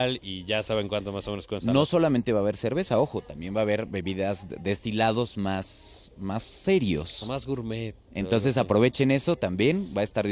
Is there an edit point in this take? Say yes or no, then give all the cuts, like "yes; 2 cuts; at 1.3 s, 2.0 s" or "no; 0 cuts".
no; 0 cuts